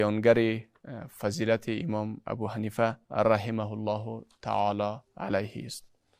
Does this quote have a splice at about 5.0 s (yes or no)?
no